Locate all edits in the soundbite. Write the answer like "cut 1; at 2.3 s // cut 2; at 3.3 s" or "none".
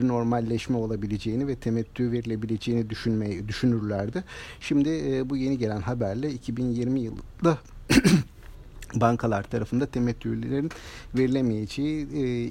none

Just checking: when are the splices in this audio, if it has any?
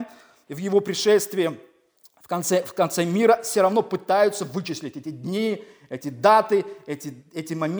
none

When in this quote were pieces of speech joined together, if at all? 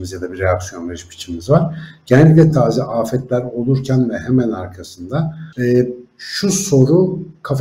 cut 1; at 2.5 s // cut 2; at 5.5 s

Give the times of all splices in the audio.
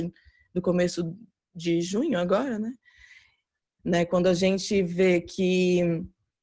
cut 1; at 3.8 s

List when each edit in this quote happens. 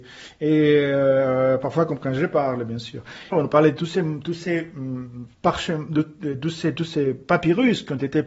cut 1; at 3.3 s // cut 2; at 5.3 s

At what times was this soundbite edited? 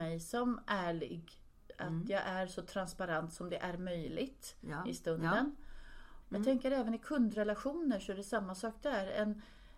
cut 1; at 6.2 s

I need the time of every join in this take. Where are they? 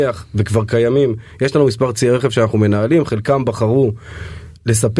none

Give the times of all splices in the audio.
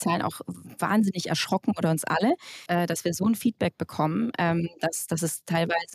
cut 1; at 2.7 s

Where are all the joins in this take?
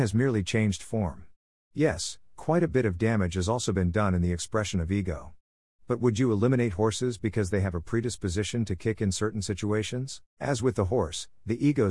cut 1; at 1.6 s // cut 2; at 10.3 s

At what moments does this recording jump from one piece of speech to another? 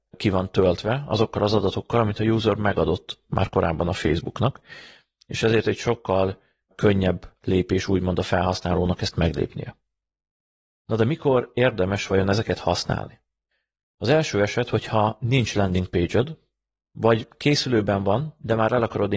none

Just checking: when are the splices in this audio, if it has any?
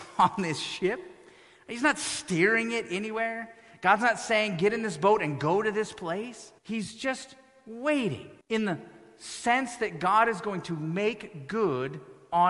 cut 1; at 6.6 s // cut 2; at 8.4 s

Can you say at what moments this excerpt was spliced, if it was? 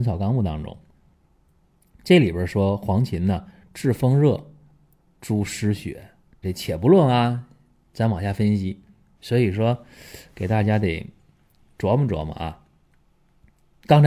cut 1; at 6.4 s // cut 2; at 9.2 s

